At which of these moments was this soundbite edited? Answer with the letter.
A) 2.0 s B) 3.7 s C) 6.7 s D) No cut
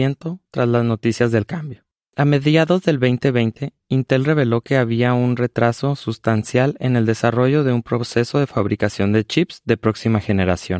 A